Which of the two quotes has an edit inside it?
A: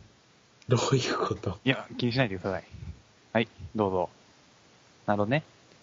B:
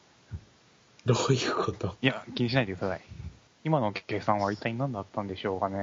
B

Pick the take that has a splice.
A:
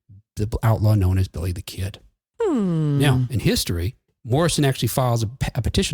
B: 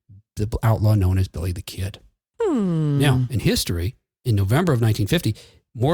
A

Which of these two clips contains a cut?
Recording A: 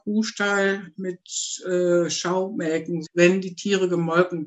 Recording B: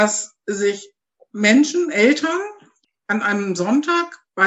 A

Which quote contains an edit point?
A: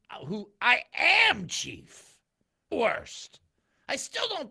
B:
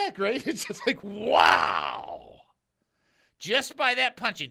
A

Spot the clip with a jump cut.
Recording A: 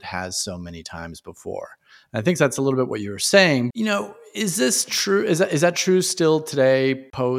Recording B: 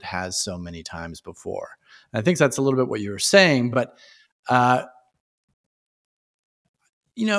A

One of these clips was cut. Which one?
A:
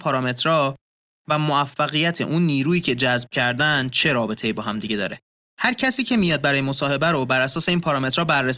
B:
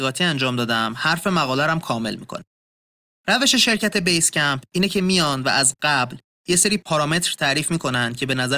A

